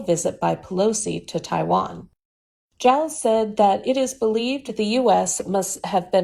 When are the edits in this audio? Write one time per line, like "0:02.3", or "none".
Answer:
0:02.6